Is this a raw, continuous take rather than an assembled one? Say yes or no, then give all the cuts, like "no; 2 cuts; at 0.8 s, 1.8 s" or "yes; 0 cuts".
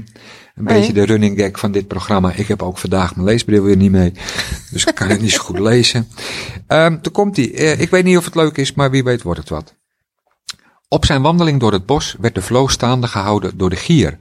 no; 1 cut; at 7.0 s